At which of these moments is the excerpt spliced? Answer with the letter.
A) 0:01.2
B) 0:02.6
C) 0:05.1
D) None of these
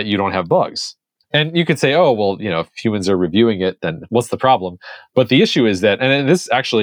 A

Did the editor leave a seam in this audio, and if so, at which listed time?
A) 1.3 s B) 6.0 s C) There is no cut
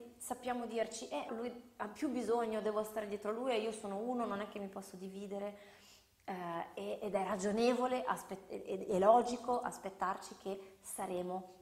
A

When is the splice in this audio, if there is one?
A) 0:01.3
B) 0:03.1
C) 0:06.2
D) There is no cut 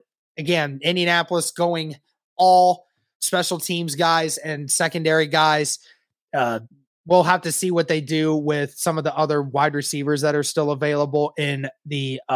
B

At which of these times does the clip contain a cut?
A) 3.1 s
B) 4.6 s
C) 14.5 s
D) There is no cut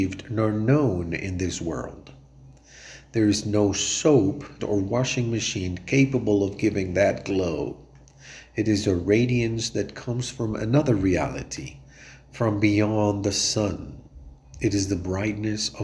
B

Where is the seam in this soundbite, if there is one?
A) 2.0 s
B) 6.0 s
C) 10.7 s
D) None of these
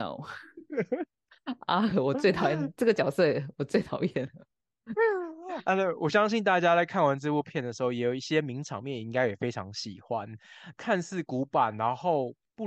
C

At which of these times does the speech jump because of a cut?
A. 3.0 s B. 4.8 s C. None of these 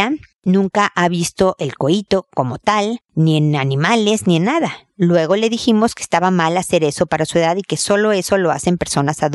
C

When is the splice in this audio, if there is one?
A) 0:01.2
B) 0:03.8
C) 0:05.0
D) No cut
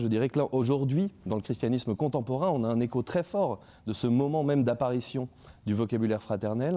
D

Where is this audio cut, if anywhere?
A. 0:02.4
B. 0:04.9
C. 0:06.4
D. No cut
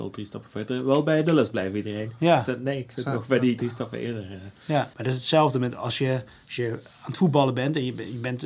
B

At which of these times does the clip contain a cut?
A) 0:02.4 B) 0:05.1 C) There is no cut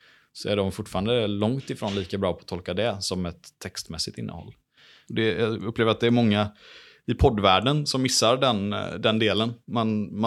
B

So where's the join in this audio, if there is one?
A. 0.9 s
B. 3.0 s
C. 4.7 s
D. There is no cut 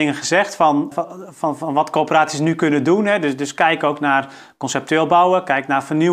A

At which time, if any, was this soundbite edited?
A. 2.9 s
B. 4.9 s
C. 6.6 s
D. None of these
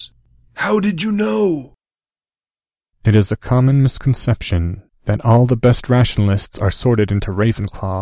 B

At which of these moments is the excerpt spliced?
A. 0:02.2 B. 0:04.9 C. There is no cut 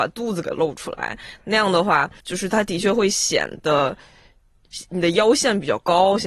A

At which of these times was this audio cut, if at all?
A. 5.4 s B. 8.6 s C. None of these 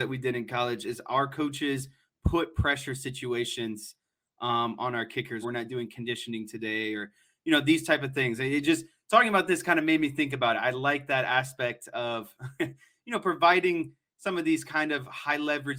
A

